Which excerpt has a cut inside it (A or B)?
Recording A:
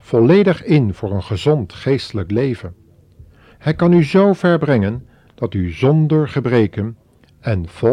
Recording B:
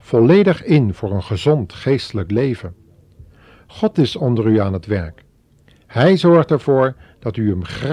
A